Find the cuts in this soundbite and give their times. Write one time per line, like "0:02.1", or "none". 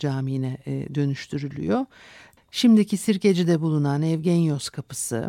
0:02.4